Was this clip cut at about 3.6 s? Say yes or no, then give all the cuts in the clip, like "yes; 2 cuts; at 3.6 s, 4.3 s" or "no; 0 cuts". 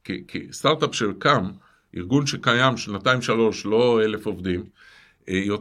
no; 0 cuts